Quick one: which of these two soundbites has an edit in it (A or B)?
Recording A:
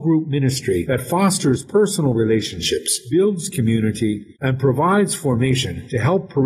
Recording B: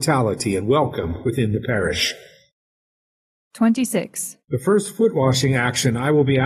B